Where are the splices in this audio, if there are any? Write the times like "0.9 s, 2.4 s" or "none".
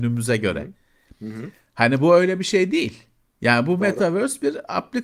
3.3 s